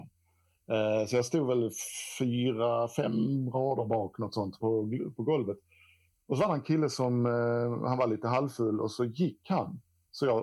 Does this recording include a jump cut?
yes; 1 cut; at 4.6 s

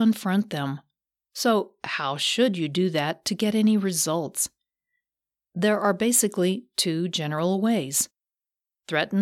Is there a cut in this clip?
no; 0 cuts

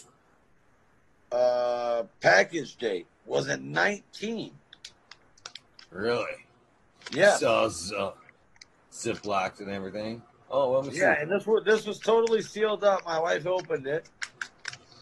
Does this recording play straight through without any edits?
yes; 0 cuts

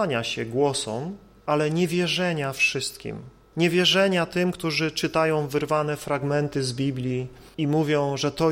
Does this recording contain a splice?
no; 0 cuts

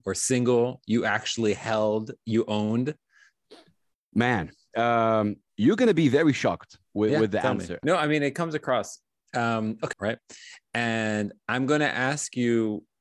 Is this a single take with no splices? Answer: no; 2 cuts; at 7.8 s, 9.9 s

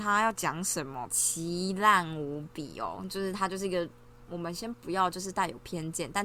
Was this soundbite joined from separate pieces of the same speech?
yes; 1 cut; at 1.1 s

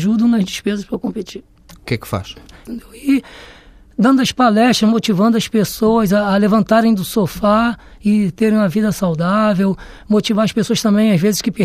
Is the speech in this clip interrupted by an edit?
yes; 1 cut; at 2.7 s

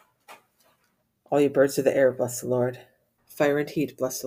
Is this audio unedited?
no; 1 cut; at 3.2 s

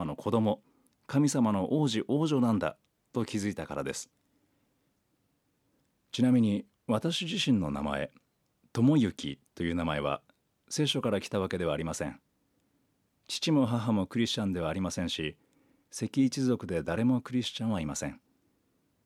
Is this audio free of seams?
yes; 0 cuts

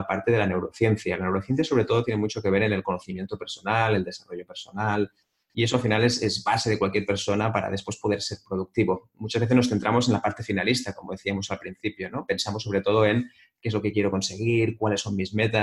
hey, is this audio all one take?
yes; 0 cuts

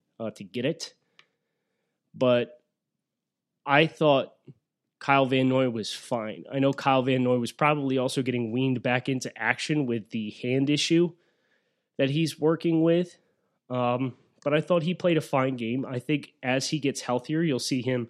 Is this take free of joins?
yes; 0 cuts

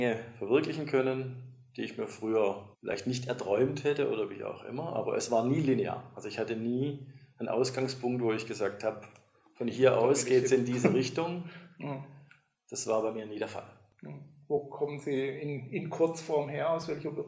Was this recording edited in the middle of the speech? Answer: yes; 1 cut; at 2.7 s

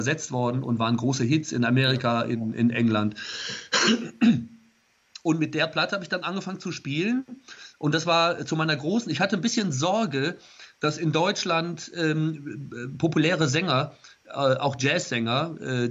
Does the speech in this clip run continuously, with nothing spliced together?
yes; 0 cuts

